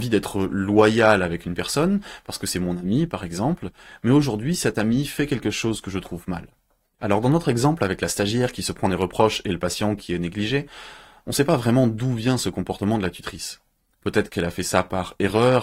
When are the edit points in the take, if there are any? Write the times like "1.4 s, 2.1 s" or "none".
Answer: 7.0 s